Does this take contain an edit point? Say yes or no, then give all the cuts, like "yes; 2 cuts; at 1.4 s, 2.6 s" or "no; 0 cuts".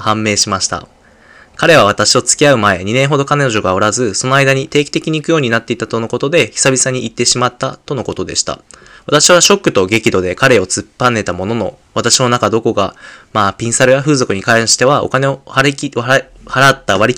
yes; 1 cut; at 9.0 s